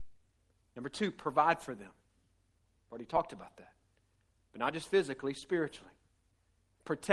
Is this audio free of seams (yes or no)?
yes